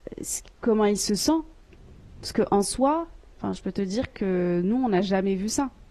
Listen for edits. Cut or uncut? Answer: uncut